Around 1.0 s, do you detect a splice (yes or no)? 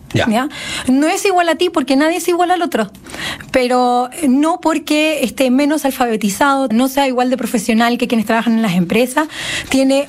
no